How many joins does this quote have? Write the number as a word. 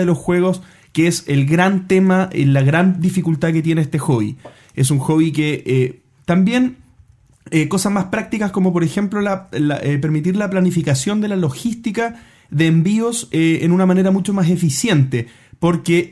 one